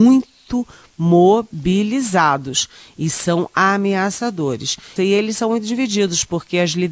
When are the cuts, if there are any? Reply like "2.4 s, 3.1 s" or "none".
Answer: 5.0 s